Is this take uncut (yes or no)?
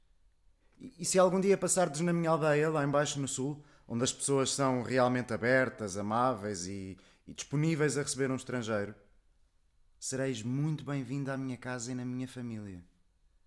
yes